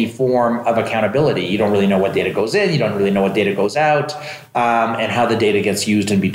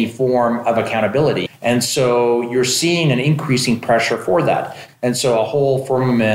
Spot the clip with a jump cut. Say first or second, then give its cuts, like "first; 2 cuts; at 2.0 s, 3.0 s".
second; 2 cuts; at 1.5 s, 4.9 s